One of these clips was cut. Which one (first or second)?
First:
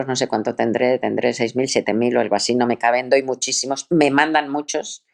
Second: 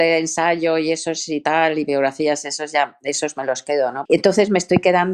second